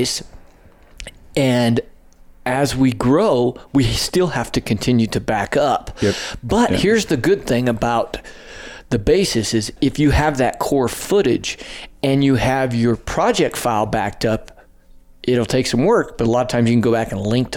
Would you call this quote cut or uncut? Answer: uncut